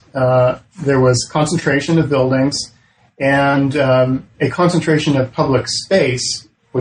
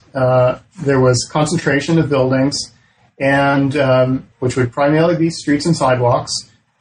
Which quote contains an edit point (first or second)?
second